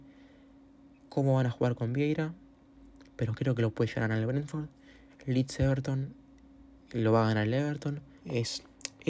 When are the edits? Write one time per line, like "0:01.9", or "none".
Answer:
0:08.2